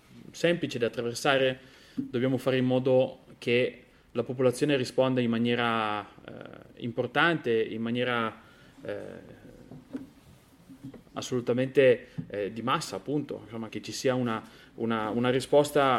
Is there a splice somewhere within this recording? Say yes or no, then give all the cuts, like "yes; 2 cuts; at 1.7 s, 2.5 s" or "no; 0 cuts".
yes; 1 cut; at 13.7 s